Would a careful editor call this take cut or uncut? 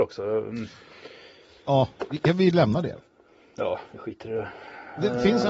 uncut